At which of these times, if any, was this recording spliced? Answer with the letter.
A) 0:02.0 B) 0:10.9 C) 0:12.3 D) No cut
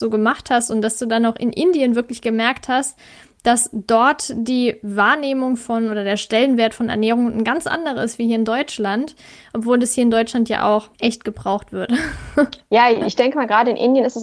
B